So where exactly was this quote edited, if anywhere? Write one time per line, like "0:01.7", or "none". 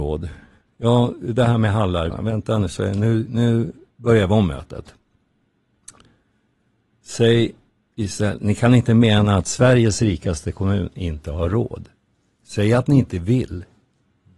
0:02.1